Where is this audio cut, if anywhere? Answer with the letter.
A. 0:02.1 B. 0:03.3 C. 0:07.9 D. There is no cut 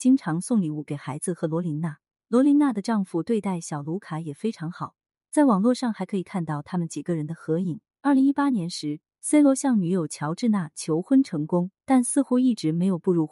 C